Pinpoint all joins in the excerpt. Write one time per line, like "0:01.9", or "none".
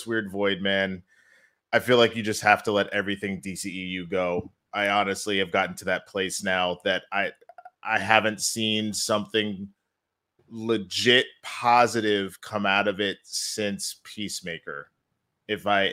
none